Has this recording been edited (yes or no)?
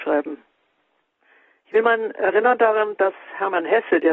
no